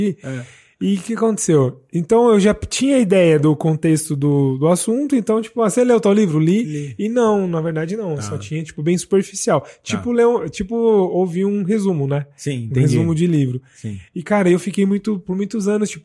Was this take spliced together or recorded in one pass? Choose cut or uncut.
uncut